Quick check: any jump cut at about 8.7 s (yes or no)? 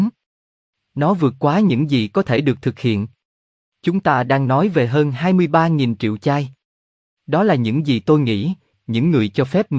yes